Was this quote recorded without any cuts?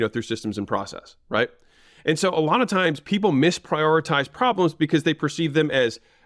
yes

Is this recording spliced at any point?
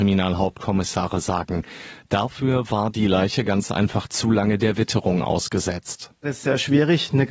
no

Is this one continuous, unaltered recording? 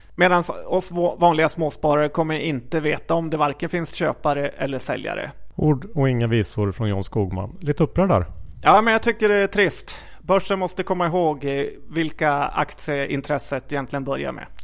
no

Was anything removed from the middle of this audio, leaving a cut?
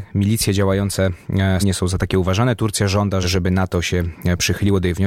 yes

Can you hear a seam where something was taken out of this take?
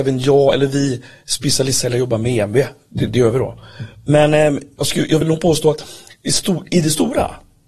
no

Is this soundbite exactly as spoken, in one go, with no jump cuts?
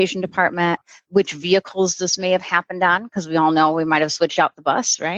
yes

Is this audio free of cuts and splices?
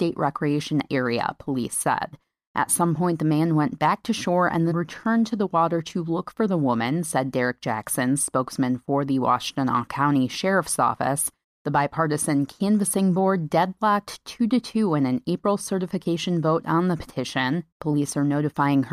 no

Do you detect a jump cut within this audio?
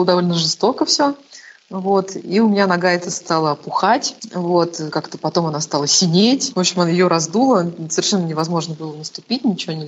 no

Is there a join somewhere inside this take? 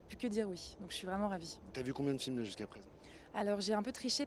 yes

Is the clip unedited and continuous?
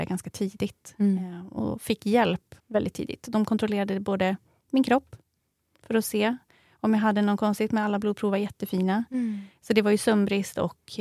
no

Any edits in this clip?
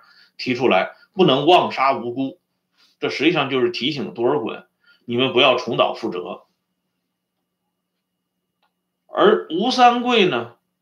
no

